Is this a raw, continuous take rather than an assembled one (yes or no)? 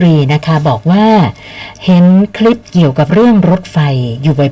no